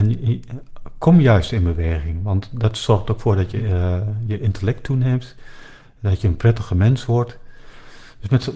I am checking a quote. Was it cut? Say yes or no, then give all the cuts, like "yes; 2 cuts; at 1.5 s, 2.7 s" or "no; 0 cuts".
no; 0 cuts